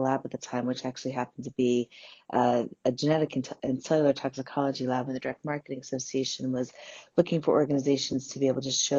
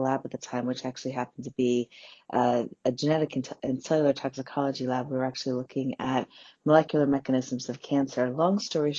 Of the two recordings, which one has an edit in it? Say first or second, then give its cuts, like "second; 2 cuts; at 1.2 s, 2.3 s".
first; 1 cut; at 5.1 s